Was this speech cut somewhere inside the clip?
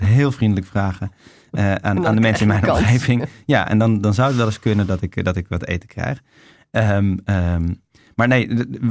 no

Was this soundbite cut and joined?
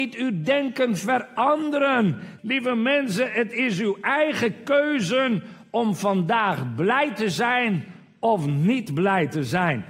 yes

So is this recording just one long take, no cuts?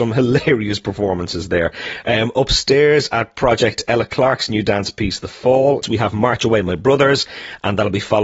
no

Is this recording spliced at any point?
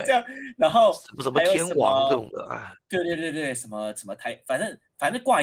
no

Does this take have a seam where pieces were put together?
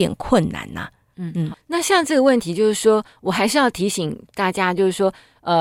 yes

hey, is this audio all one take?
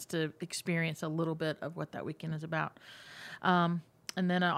yes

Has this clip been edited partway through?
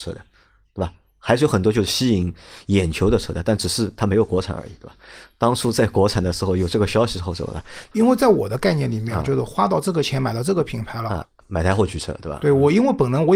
yes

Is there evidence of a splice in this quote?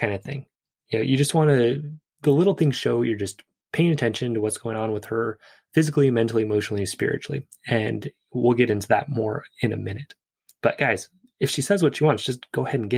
yes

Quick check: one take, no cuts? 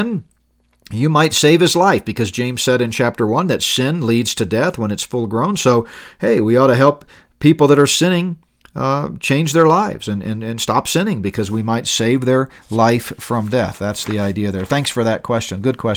yes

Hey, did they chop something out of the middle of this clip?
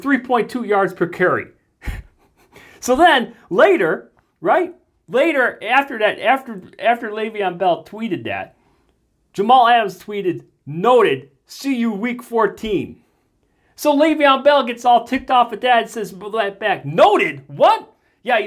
no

